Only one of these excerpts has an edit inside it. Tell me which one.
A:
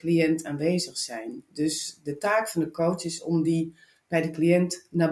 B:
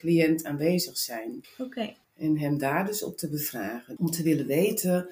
B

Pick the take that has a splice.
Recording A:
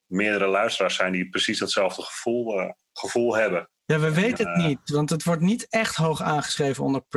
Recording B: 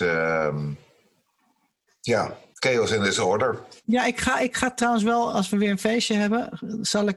A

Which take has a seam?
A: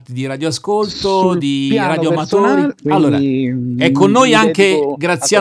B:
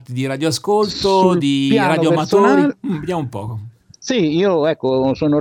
A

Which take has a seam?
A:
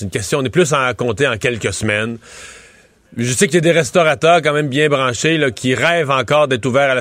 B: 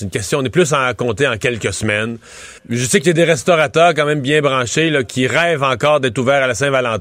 B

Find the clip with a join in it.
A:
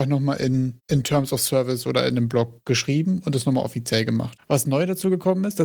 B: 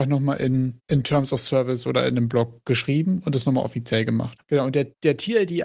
B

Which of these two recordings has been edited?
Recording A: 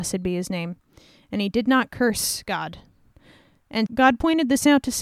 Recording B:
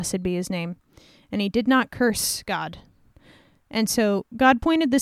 A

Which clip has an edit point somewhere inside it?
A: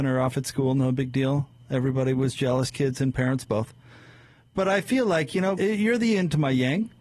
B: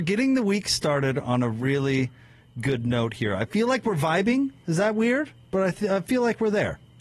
A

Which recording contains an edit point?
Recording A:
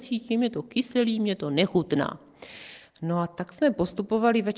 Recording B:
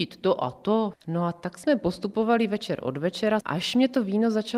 B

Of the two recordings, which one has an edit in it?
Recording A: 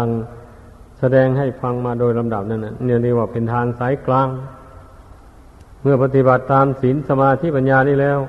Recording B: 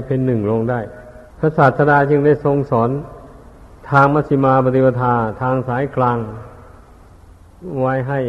B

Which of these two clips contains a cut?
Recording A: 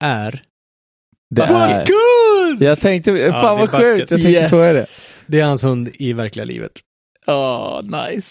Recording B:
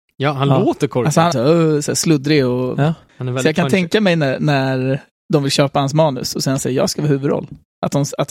B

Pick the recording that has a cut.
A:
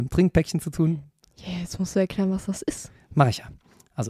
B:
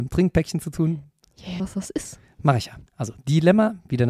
B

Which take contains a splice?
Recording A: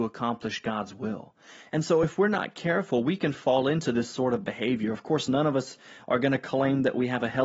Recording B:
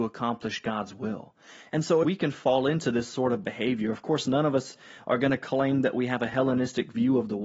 B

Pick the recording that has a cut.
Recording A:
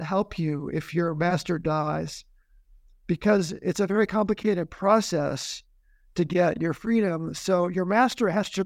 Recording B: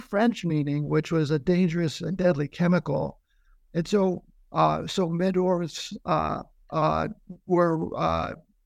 B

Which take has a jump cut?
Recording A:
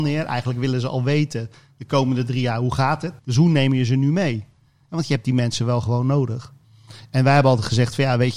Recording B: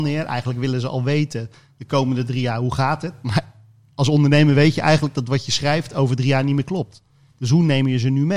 A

